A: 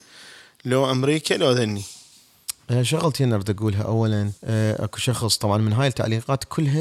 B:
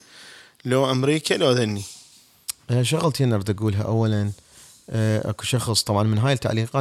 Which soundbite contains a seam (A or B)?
A